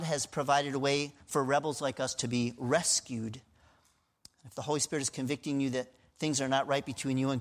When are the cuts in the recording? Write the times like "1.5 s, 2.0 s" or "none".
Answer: none